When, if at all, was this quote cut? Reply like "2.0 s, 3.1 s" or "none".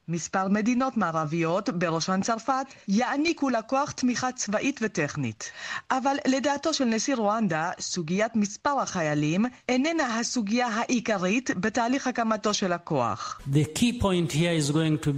none